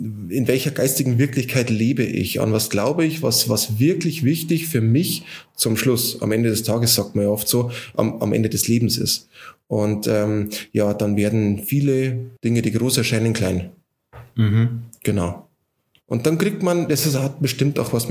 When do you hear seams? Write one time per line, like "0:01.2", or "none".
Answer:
0:12.4